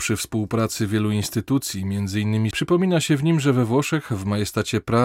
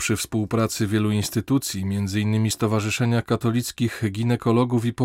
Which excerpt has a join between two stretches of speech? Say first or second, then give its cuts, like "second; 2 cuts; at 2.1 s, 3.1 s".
first; 1 cut; at 2.5 s